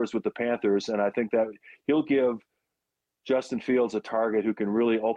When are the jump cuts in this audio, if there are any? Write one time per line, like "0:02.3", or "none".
none